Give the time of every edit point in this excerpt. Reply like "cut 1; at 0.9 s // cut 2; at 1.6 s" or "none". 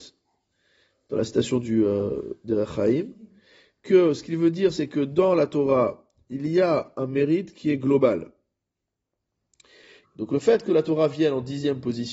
cut 1; at 10.0 s